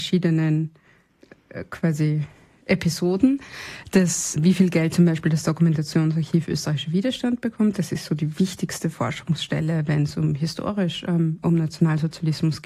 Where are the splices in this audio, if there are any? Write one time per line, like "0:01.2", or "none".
0:04.4